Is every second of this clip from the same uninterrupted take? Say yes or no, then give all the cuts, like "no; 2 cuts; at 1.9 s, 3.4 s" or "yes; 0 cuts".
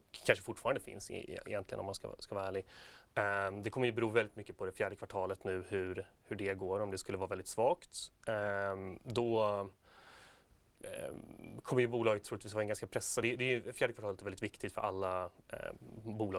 yes; 0 cuts